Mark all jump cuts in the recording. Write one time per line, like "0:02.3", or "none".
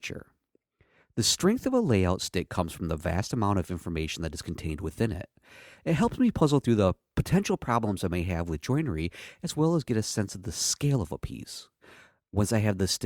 none